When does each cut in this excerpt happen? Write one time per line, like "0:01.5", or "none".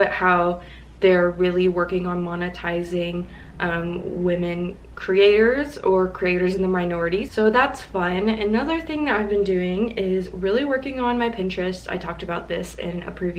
0:07.3